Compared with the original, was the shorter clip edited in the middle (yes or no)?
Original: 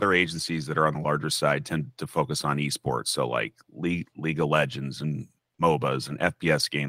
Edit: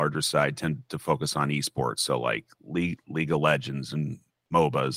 no